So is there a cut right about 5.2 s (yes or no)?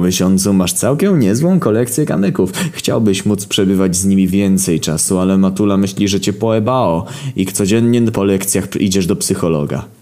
no